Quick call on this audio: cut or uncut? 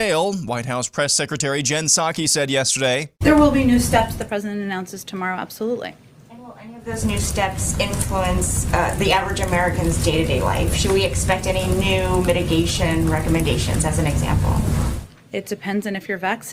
uncut